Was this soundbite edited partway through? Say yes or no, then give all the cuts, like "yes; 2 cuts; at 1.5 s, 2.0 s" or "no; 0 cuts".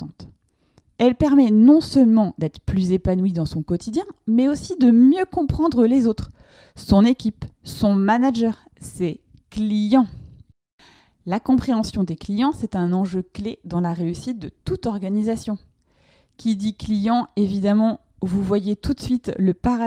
no; 0 cuts